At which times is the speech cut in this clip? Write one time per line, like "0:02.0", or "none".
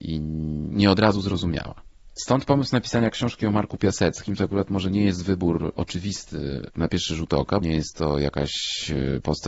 0:02.2
0:07.6